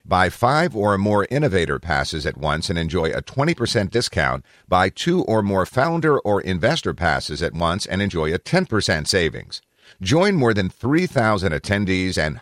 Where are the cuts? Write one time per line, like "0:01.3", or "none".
none